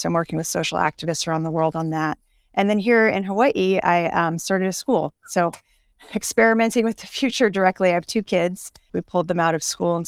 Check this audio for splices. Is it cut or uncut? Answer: cut